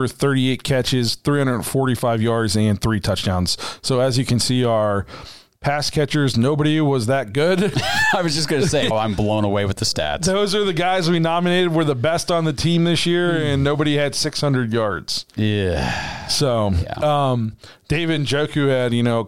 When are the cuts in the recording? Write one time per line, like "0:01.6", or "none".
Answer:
0:08.9